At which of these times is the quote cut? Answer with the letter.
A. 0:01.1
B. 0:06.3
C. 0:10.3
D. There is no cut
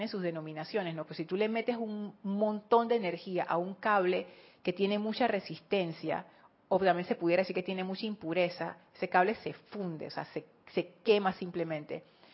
A